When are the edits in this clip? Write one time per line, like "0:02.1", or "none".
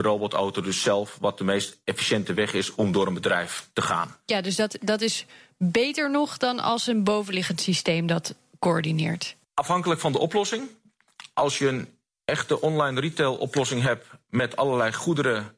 none